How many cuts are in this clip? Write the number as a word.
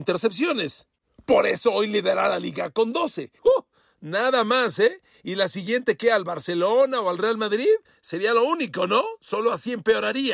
one